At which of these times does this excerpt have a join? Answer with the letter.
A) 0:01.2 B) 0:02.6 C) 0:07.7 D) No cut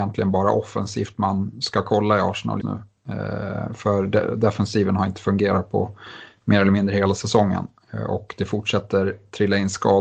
B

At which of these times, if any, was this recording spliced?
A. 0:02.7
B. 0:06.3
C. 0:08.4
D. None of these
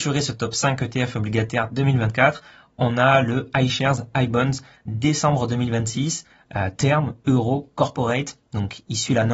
D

